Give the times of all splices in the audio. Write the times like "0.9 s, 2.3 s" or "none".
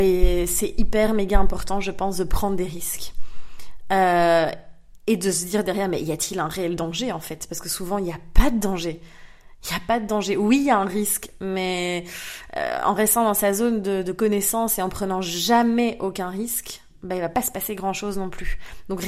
none

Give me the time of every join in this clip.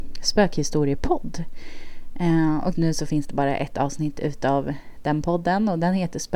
2.7 s

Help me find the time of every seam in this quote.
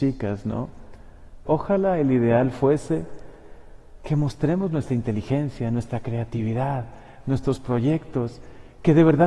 1.5 s

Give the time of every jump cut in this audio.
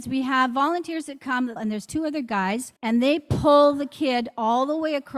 1.6 s, 2.8 s

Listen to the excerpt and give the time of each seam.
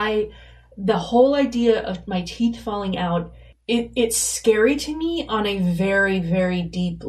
none

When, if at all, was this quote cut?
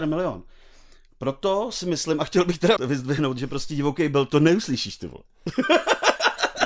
2.8 s

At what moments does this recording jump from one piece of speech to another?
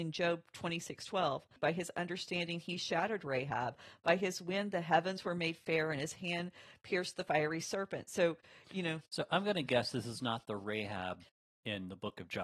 1.6 s

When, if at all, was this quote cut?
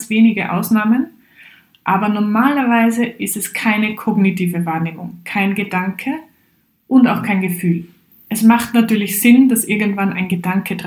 8.1 s

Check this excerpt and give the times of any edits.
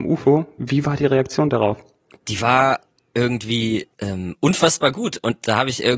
3.9 s

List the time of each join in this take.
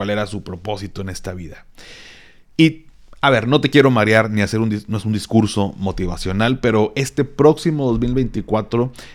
none

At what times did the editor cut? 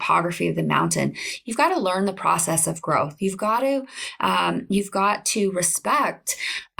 none

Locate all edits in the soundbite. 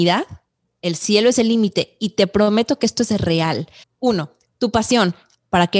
3.8 s

